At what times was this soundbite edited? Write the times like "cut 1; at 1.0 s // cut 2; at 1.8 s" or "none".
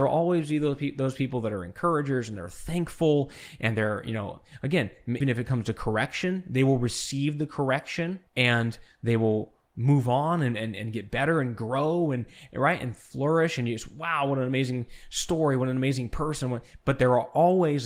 cut 1; at 5.2 s // cut 2; at 8.3 s